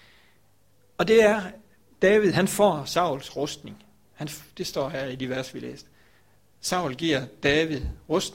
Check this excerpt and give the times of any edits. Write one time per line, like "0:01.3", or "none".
none

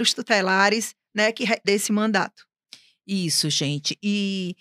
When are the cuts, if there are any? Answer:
0:01.6

